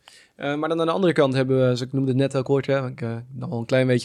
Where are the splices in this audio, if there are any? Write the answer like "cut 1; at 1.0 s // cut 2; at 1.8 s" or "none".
none